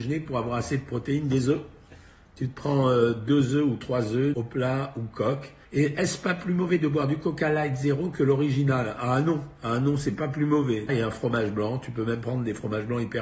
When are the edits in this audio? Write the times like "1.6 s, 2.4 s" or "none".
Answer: 4.3 s, 5.6 s, 10.9 s